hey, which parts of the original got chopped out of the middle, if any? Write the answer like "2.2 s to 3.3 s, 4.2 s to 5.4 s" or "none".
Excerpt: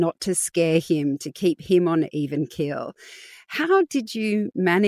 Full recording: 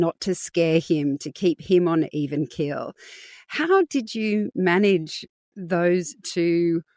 none